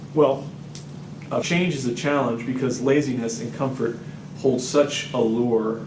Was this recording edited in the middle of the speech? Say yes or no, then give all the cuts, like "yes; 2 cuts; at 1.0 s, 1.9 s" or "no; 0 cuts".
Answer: yes; 1 cut; at 1.4 s